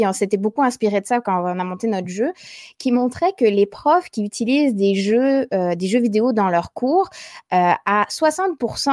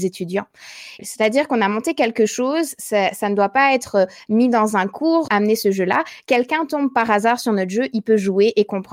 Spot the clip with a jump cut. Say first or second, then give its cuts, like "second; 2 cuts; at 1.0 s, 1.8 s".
second; 2 cuts; at 1.0 s, 5.3 s